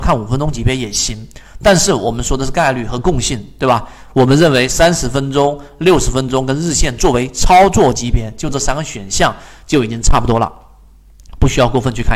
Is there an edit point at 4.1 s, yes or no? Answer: no